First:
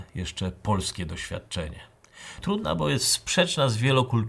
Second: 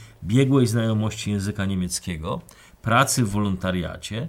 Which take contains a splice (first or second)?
first